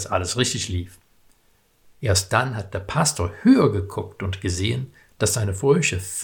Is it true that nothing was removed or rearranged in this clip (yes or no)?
no